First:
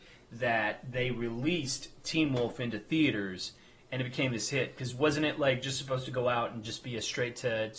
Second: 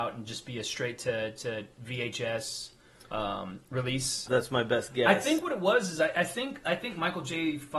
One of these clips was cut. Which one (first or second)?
second